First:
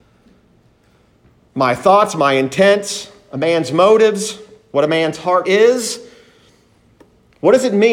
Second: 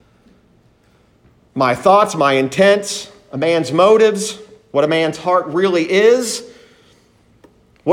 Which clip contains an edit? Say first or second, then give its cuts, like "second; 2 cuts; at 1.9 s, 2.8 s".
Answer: first; 1 cut; at 5.4 s